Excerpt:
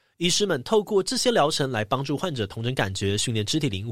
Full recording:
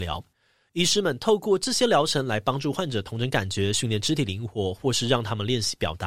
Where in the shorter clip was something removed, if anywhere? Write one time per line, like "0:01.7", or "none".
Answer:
none